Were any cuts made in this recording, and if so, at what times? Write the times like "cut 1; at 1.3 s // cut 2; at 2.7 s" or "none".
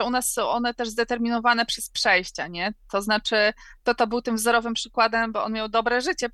none